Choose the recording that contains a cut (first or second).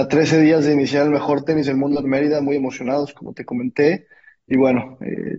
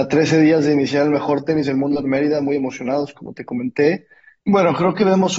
second